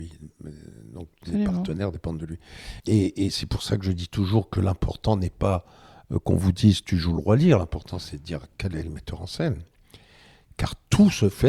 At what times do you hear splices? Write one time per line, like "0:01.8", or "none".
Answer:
0:02.8